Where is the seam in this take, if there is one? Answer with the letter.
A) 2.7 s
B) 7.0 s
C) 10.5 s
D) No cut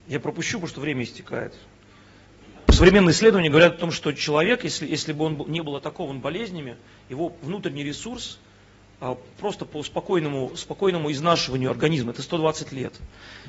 A